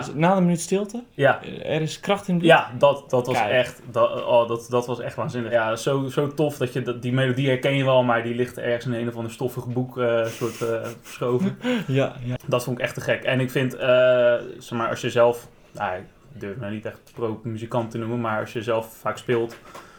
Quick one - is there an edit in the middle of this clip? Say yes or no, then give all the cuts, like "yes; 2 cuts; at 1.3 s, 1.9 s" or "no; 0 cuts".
yes; 1 cut; at 12.4 s